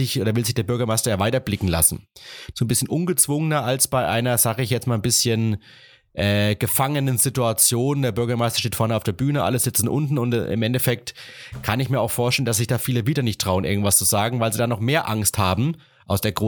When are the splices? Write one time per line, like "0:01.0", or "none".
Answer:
0:02.5